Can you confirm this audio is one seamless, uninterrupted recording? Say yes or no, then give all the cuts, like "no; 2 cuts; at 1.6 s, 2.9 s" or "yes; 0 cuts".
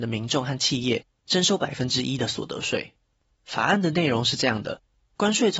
no; 1 cut; at 3.3 s